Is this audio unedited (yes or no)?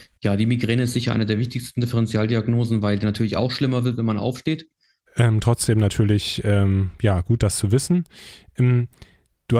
no